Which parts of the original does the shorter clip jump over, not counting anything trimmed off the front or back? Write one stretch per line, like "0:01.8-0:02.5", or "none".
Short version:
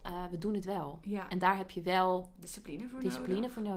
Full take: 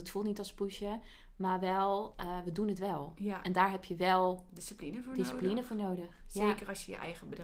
none